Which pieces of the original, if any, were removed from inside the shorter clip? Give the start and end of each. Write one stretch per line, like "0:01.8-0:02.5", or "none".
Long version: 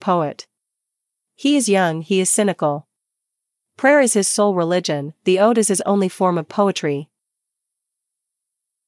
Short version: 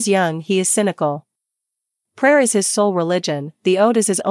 none